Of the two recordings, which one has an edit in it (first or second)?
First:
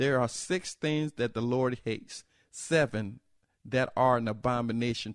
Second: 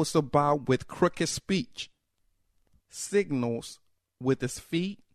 second